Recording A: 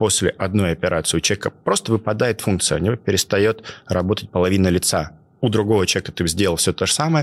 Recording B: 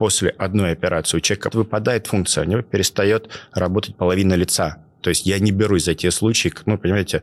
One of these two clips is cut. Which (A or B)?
B